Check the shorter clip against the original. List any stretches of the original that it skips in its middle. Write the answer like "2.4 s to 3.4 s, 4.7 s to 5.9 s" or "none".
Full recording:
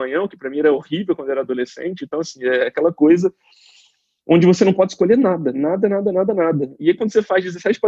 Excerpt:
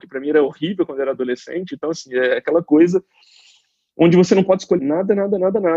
5.1 s to 5.5 s